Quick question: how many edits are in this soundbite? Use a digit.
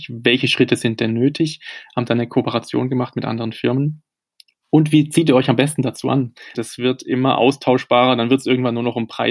1